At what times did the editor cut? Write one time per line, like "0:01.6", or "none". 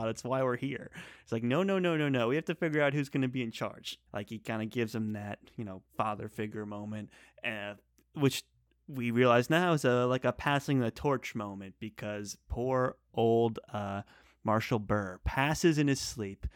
0:04.1
0:05.9

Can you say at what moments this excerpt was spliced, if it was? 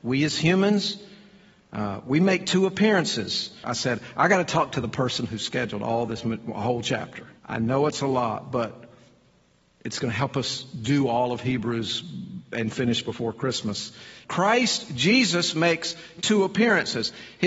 0:03.6
0:07.4
0:14.2

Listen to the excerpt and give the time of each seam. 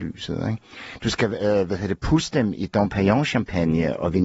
none

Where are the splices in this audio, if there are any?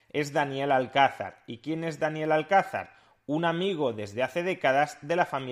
none

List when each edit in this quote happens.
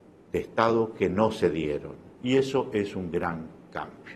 0:02.1

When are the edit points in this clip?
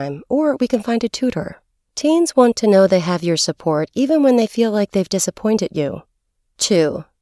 none

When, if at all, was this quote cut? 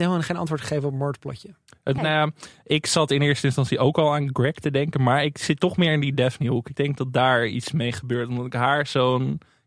0:02.0

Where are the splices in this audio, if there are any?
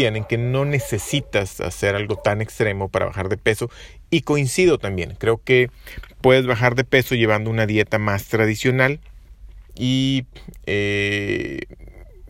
0:09.7

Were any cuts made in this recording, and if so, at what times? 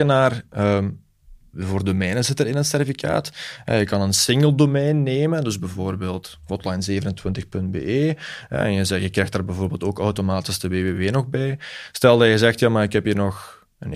0:01.5

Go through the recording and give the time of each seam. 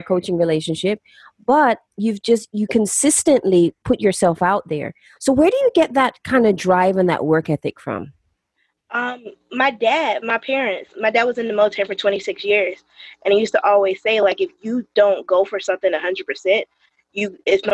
0:05.2
0:10.9

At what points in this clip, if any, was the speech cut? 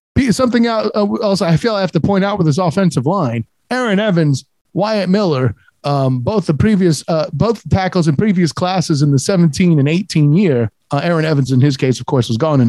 none

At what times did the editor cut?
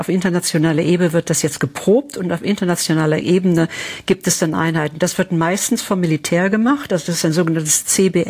0:06.9

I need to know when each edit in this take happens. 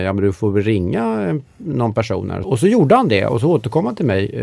0:02.4

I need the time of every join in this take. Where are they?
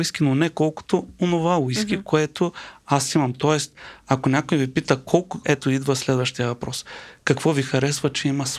0:05.4

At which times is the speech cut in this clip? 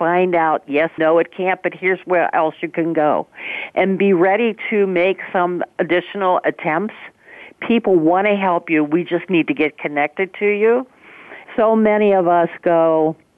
0:01.0
0:11.4

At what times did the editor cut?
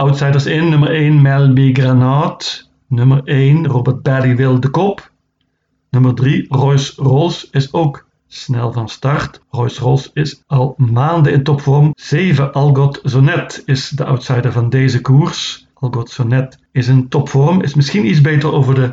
0:11.9

